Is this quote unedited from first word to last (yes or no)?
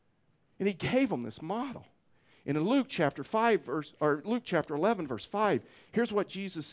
yes